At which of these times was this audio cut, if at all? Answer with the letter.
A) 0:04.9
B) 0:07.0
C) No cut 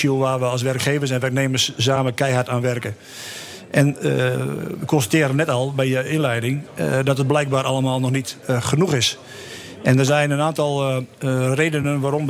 C